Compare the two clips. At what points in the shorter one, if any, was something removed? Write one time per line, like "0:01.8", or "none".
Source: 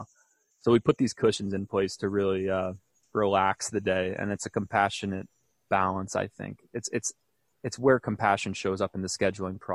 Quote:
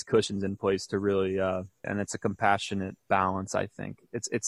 0:01.8
0:03.0